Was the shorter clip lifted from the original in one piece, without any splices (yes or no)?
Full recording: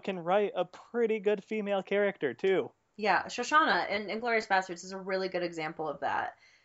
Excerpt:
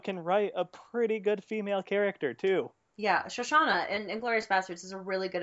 yes